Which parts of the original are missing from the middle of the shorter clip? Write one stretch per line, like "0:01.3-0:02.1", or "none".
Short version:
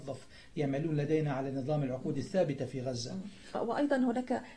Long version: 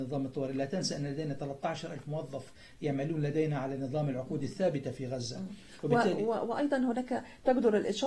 0:05.8-0:06.4